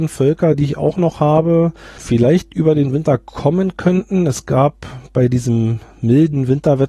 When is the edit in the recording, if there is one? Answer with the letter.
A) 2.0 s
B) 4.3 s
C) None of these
A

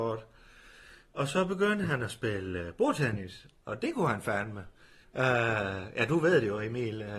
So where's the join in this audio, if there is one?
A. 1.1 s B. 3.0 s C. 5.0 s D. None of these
C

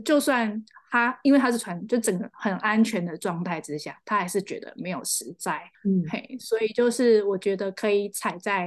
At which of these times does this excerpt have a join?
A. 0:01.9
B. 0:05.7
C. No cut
B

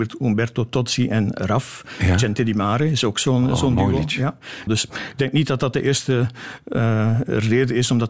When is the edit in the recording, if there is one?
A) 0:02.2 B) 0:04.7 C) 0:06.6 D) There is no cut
B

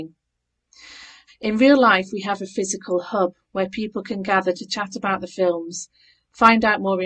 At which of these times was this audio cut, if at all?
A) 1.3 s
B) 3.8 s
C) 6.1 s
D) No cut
A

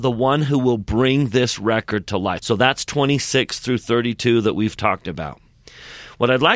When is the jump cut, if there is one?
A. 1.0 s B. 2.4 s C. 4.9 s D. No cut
B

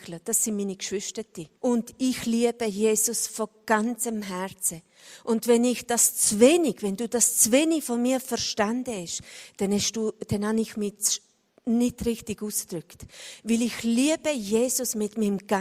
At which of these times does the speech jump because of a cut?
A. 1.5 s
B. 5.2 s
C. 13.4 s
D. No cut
A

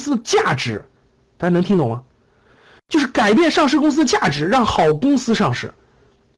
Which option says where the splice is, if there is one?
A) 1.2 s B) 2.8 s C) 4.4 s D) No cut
D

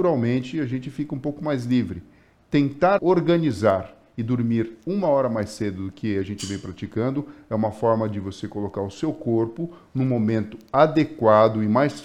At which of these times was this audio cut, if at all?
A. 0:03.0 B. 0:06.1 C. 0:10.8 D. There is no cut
A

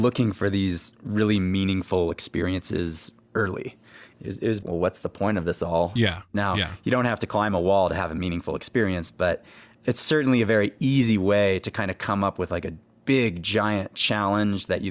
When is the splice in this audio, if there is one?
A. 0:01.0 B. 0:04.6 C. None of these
B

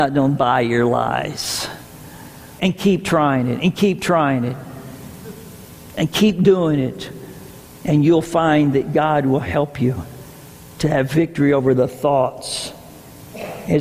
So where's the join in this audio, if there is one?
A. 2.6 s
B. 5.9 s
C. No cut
A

